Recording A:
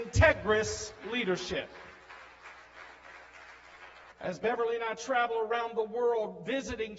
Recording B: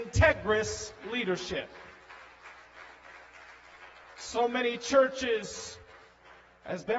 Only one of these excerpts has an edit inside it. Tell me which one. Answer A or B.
A